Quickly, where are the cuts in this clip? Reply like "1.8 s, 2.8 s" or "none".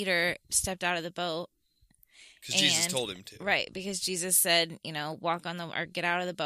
none